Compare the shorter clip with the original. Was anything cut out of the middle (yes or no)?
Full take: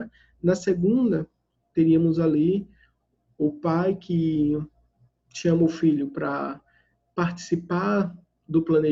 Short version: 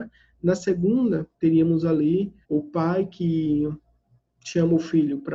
yes